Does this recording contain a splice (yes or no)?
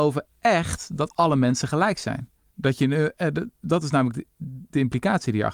no